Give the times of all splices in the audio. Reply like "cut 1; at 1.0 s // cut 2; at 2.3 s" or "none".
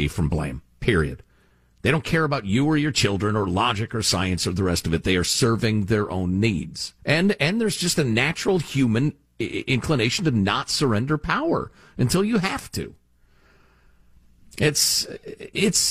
cut 1; at 7.0 s